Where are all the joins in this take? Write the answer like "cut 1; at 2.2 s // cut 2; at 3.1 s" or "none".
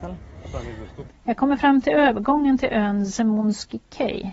cut 1; at 1.1 s